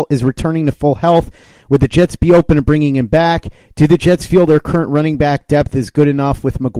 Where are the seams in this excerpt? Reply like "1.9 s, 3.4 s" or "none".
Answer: none